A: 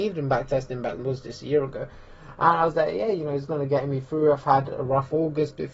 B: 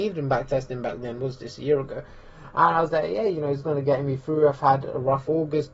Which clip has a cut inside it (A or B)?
A